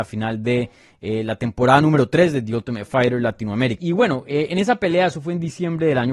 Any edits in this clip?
yes; 1 cut; at 3.8 s

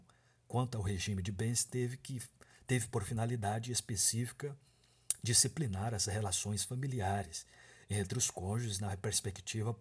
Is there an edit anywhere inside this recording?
no; 0 cuts

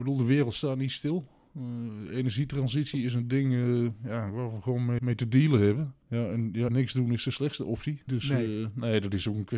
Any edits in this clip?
yes; 3 cuts; at 5.0 s, 6.7 s, 8.1 s

